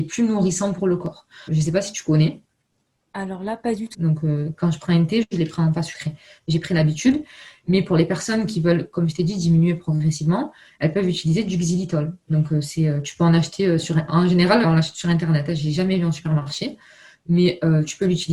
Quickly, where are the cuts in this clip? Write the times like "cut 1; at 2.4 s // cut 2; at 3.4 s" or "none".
cut 1; at 1.5 s // cut 2; at 3.9 s // cut 3; at 14.6 s